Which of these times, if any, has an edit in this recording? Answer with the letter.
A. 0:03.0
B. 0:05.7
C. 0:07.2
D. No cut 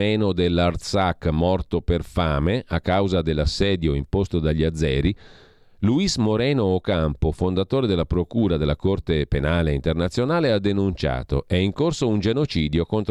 D